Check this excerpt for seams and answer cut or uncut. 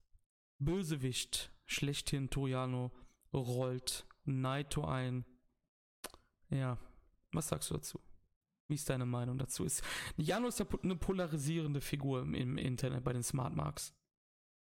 uncut